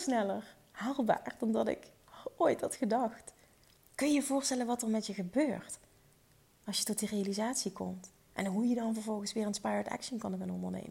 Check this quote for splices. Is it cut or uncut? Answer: uncut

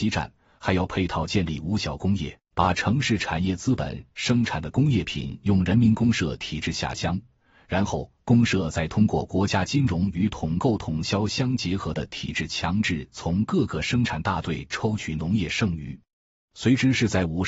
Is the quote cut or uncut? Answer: cut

